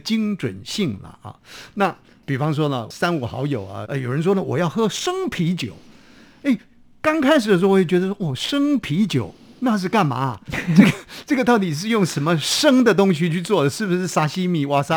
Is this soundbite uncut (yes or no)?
no